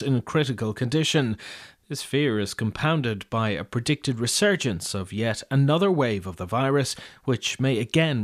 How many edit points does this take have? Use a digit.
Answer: 0